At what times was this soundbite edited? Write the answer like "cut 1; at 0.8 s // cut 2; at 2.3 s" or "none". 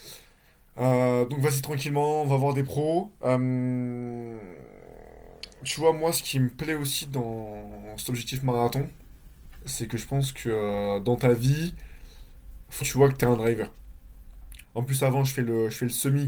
cut 1; at 3.2 s // cut 2; at 12.8 s // cut 3; at 14.6 s

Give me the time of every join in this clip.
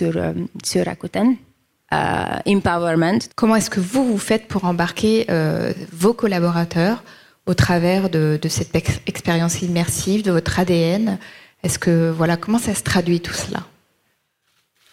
cut 1; at 1.7 s // cut 2; at 3.3 s

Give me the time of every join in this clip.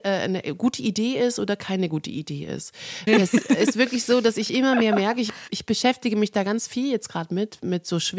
cut 1; at 3.1 s

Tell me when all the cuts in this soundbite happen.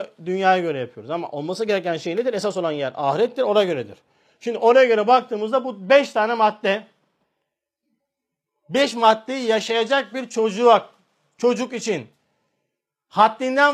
none

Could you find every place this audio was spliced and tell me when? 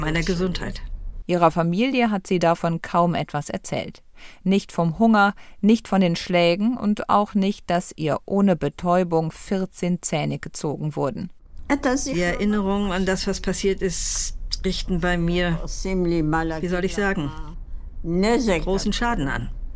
cut 1; at 1.2 s

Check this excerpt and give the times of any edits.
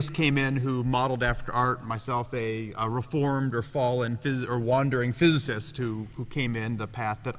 none

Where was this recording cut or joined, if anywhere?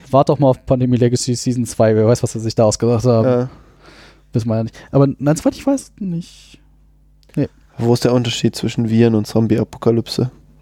none

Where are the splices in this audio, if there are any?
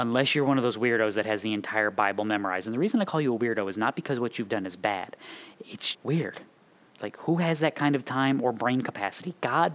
cut 1; at 5.9 s

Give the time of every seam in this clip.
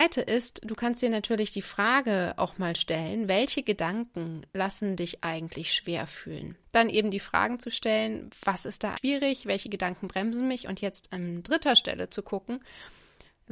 cut 1; at 6.6 s // cut 2; at 9.0 s

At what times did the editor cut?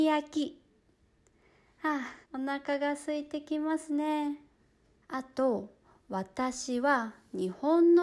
cut 1; at 2.2 s // cut 2; at 4.9 s

